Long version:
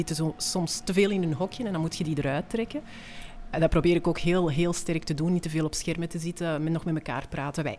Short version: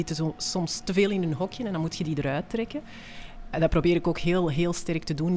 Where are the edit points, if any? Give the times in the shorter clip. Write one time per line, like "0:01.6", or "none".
none